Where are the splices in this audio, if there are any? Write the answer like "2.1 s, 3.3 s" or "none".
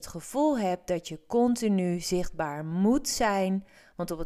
none